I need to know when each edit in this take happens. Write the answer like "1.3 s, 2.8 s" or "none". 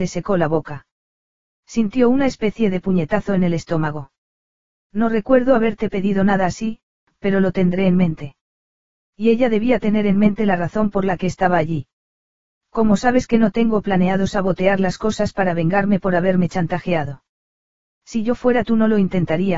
none